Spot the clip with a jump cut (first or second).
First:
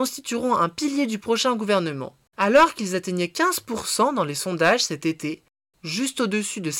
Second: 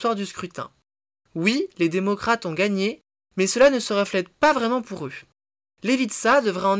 first